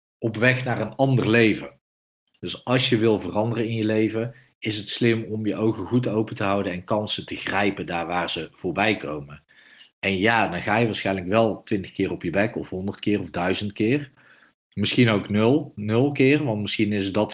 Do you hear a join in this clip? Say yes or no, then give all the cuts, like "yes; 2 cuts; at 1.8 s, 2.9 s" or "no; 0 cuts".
yes; 1 cut; at 2.3 s